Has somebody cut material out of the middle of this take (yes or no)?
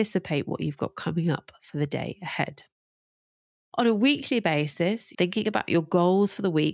yes